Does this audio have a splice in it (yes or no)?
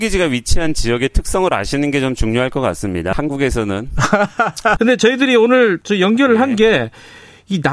yes